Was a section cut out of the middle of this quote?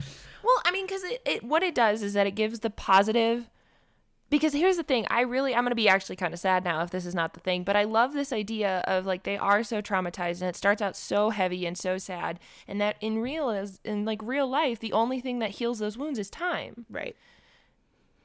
no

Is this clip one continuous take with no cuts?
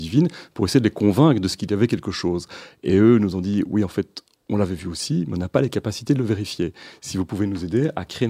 yes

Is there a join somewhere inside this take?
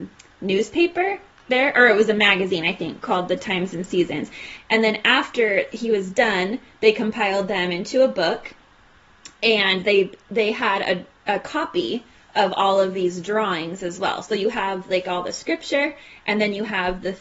yes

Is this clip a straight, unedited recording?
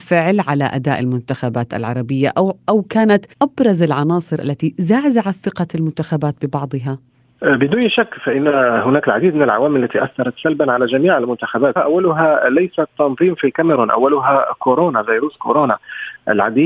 no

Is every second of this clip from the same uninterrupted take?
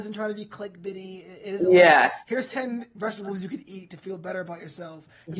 yes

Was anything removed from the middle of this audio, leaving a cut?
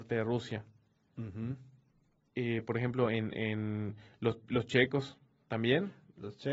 no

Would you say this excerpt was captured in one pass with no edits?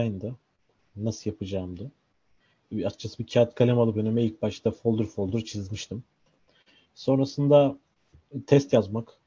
yes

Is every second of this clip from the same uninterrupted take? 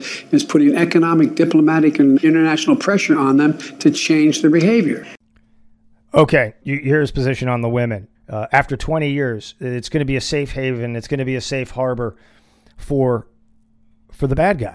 no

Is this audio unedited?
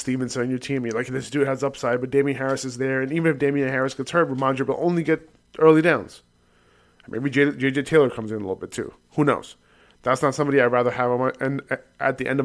yes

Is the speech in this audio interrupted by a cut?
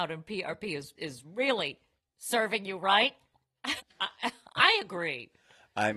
yes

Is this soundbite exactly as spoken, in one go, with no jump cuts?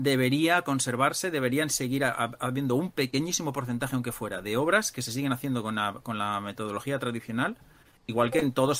yes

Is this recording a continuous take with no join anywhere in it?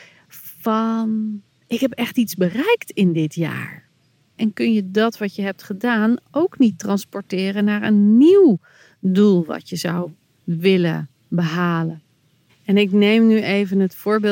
no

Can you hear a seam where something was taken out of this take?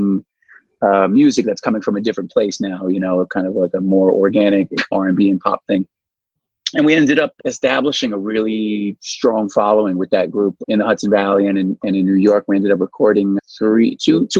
no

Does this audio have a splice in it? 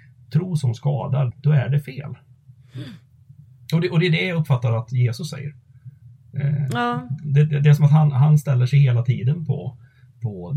yes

